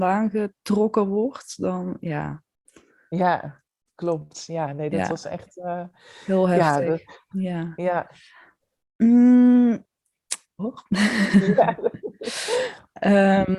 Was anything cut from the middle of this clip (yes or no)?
yes